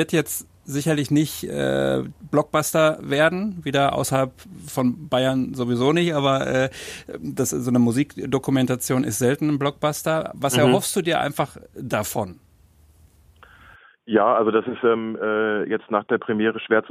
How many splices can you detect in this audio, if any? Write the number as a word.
zero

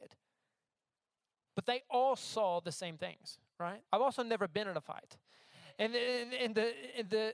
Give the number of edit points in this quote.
one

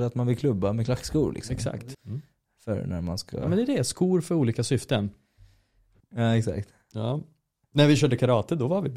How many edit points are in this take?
two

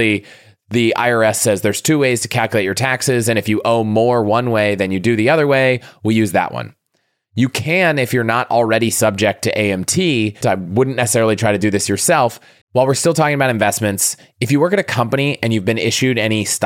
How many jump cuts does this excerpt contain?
two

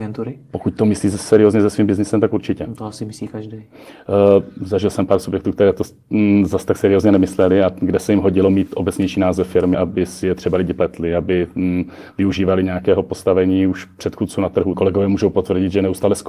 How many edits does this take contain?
two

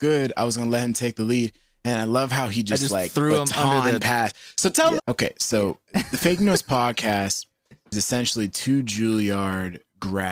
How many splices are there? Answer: one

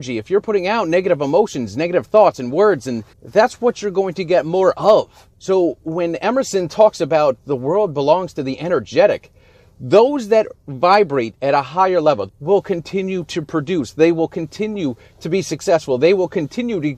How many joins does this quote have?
three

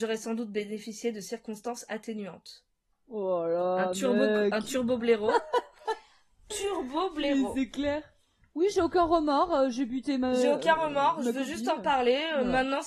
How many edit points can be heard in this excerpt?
zero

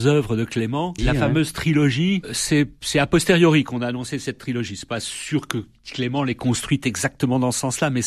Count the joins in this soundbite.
one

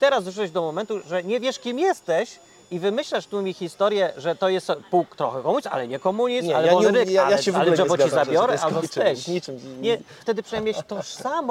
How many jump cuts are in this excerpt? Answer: two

